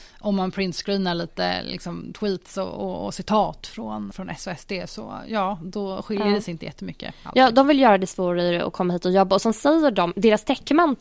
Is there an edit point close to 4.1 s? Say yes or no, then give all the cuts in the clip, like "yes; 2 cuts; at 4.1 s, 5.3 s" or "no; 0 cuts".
yes; 1 cut; at 4.1 s